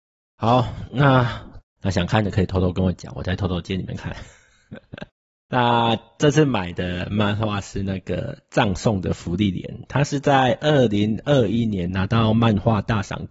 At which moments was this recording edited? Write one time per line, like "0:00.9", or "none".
0:01.6